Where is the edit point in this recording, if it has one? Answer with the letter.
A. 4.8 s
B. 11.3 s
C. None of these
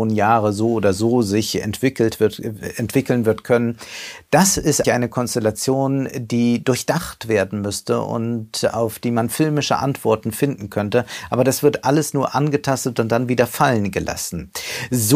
A